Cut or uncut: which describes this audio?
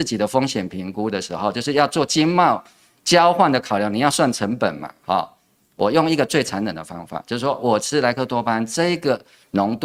uncut